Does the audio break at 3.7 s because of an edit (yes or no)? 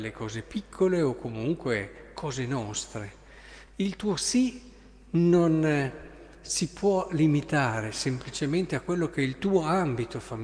no